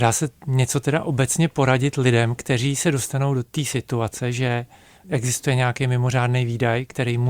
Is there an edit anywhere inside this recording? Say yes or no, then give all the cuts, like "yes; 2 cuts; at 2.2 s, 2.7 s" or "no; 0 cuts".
no; 0 cuts